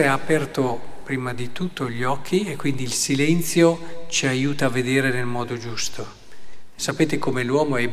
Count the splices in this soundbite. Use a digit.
1